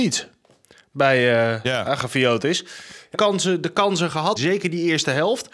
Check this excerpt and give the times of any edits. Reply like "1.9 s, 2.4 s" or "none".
3.1 s, 4.4 s